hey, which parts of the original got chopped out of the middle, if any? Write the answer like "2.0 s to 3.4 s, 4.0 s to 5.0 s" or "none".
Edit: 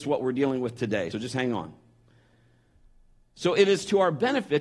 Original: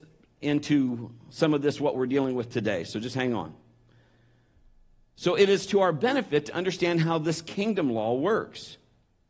2.9 s to 2.9 s